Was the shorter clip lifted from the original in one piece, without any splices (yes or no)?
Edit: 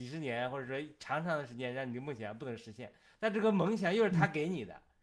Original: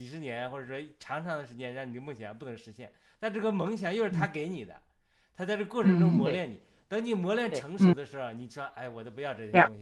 yes